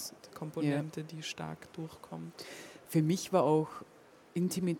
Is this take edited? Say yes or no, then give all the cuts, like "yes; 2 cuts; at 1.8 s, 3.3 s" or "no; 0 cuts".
no; 0 cuts